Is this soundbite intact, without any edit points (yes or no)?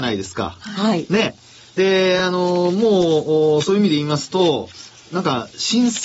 yes